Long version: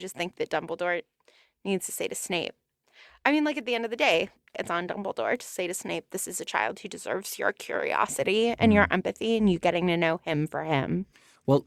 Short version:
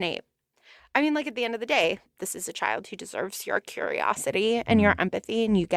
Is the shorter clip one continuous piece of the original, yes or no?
no